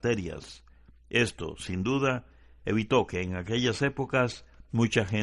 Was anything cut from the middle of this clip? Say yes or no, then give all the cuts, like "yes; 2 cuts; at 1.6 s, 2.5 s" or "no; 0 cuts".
no; 0 cuts